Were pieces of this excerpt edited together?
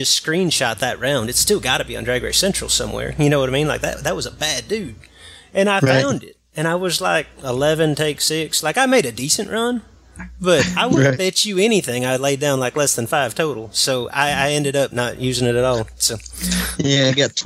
no; 0 cuts

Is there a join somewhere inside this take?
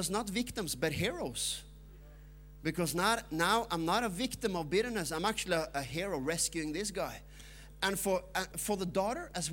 yes; 1 cut; at 8.5 s

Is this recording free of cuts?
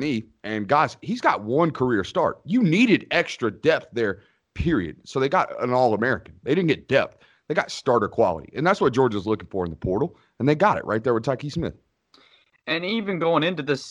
yes; 0 cuts

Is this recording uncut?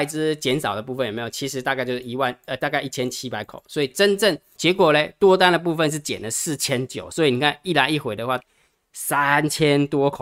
no; 2 cuts; at 4.6 s, 8.4 s

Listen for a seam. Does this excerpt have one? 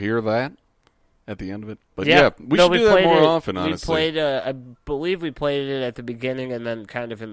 no; 0 cuts

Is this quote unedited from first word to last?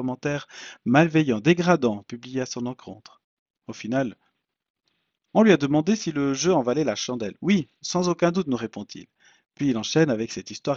yes; 0 cuts

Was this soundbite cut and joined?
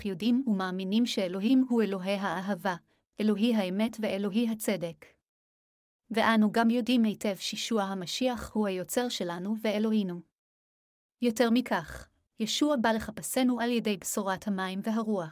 yes; 1 cut; at 12.3 s

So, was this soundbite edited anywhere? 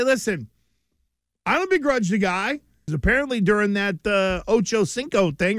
yes; 1 cut; at 2.9 s

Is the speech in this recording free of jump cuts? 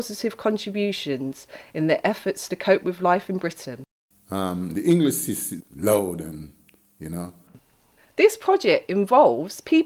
no; 1 cut; at 5.6 s

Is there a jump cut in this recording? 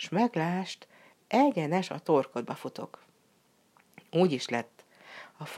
no; 0 cuts

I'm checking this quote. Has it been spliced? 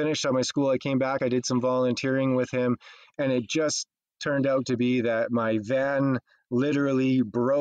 no; 0 cuts

